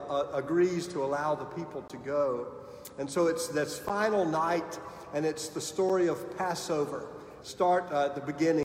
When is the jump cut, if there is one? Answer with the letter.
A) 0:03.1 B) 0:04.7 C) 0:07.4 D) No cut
C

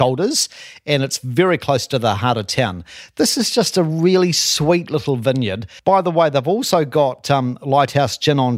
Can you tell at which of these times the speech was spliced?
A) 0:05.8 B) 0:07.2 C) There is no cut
A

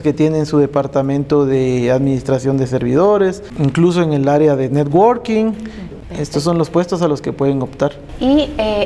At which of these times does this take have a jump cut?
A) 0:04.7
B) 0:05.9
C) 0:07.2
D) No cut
B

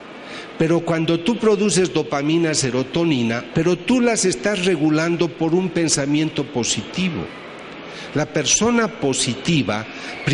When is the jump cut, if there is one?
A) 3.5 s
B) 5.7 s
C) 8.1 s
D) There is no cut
A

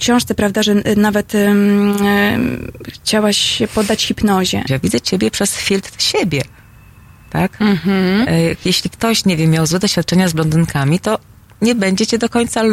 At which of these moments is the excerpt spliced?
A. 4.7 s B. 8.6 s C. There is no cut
A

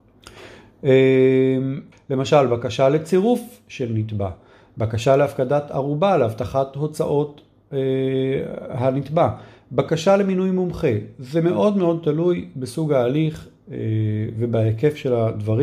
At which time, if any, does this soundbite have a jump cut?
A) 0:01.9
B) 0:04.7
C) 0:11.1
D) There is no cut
A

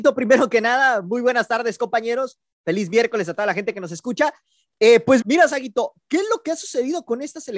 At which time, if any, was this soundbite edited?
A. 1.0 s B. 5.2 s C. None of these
B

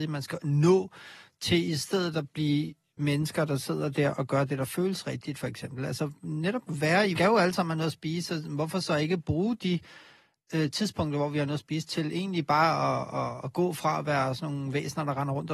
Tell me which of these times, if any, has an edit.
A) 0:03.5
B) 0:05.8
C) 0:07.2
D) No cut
C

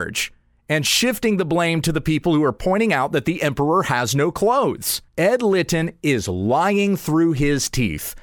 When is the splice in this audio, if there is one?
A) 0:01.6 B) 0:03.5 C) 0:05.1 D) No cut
C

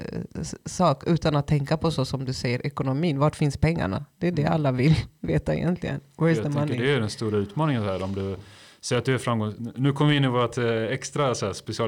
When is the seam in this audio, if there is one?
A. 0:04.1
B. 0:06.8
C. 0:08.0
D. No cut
D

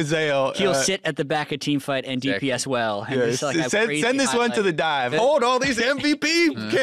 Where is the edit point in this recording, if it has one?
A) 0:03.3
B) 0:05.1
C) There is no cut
B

